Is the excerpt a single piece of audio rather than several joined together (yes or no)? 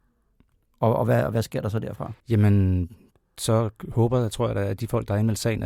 no